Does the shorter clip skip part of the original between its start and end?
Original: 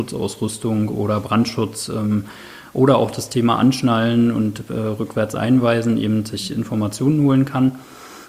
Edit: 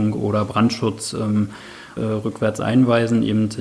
yes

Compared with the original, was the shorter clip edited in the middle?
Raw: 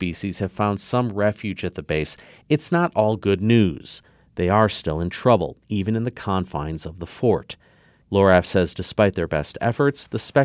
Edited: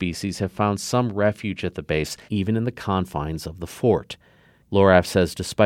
yes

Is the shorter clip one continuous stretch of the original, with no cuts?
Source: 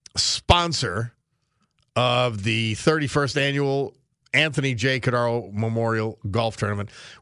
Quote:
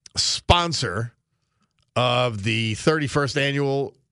yes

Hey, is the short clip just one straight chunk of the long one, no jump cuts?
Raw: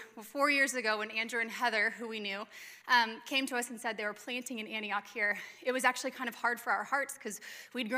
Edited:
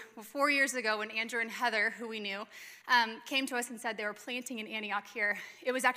yes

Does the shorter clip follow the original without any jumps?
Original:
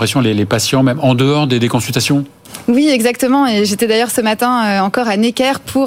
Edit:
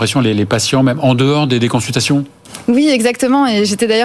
yes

